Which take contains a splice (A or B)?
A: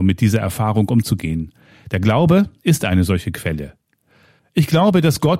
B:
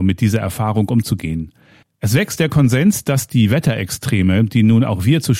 B